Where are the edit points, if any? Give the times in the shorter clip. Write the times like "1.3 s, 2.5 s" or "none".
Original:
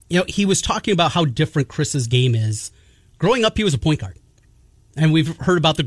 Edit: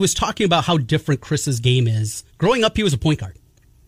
2.3 s